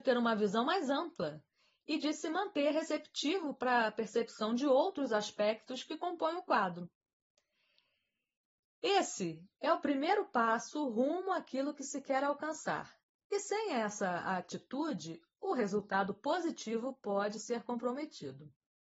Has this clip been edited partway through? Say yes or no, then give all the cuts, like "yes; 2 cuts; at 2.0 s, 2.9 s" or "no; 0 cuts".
no; 0 cuts